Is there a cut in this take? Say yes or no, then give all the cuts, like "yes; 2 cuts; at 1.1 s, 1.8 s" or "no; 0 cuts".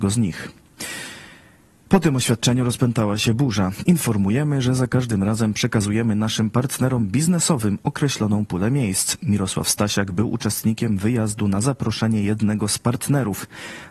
yes; 1 cut; at 3.9 s